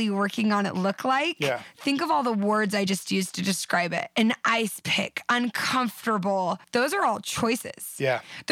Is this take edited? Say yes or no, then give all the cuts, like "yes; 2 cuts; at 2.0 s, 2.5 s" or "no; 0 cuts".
no; 0 cuts